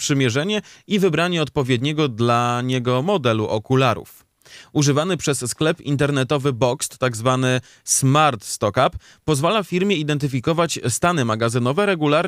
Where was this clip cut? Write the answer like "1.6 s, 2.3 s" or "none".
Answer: none